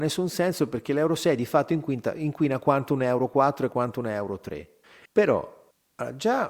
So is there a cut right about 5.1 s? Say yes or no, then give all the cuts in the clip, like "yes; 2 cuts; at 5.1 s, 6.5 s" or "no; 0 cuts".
yes; 1 cut; at 5.1 s